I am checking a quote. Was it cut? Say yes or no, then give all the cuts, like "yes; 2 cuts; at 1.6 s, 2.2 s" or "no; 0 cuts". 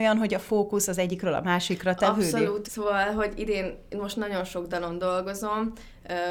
yes; 1 cut; at 2.7 s